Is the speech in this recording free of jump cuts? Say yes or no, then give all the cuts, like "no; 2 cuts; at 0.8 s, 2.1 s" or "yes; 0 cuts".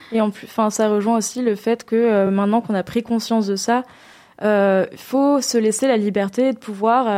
yes; 0 cuts